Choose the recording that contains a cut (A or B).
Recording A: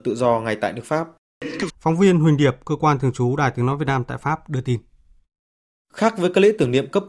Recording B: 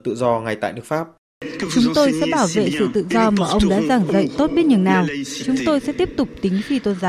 A